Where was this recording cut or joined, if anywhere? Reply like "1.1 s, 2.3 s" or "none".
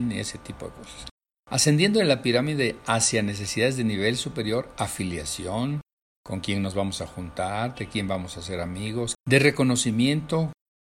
1.3 s, 9.1 s